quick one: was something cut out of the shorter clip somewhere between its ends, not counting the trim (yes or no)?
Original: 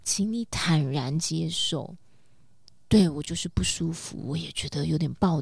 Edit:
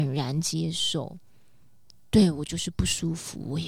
no